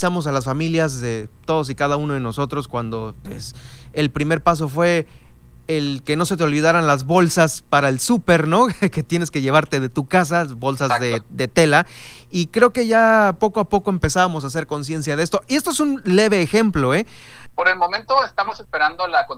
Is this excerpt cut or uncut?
cut